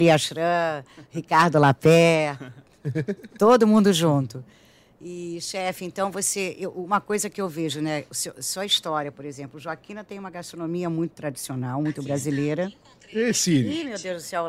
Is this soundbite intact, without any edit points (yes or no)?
yes